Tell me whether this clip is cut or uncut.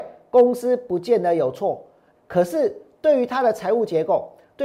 cut